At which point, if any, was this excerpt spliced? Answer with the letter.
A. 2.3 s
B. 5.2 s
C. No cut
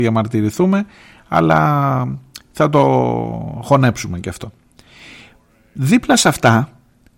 C